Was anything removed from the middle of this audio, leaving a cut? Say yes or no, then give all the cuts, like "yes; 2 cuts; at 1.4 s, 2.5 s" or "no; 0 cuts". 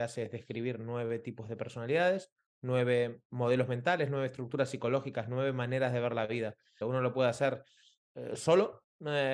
yes; 1 cut; at 6.8 s